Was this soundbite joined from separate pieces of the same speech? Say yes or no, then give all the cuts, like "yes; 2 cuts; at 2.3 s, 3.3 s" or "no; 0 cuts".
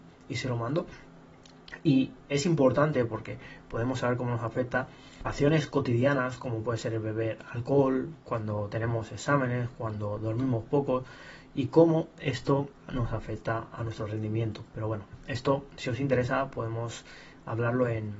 no; 0 cuts